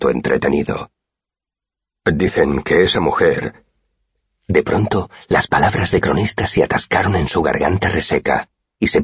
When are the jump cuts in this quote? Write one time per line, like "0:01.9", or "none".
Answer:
0:01.9